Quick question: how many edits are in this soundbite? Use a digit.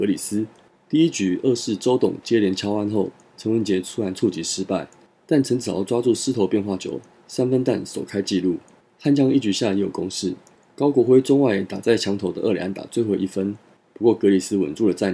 0